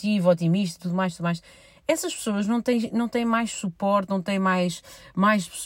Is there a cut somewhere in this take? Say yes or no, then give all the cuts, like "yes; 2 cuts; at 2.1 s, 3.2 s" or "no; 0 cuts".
no; 0 cuts